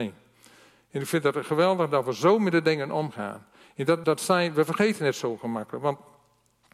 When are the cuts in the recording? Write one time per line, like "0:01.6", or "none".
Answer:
0:04.0